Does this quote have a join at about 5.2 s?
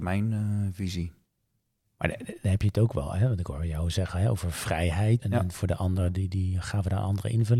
yes; 1 cut; at 5.2 s

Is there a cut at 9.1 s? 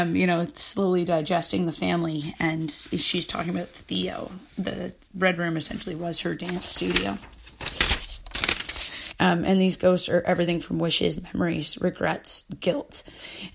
yes; 1 cut; at 9.1 s

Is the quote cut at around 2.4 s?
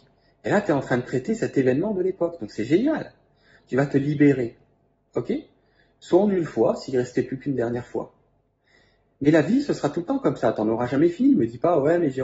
no; 1 cut; at 5.1 s

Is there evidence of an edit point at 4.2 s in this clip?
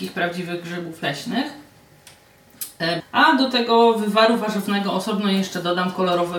no; 1 cut; at 3.0 s

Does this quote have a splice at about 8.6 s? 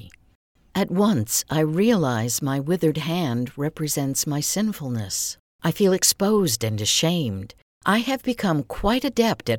no; 0 cuts

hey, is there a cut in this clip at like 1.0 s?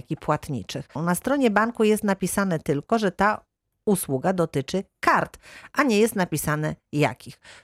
yes; 1 cut; at 1.0 s

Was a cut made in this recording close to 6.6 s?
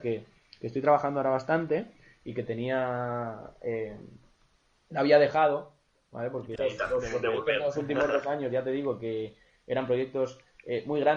yes; 1 cut; at 6.6 s

